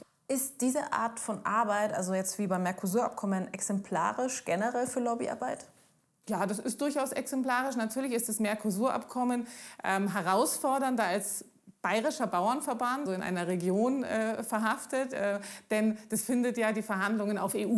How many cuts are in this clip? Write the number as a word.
one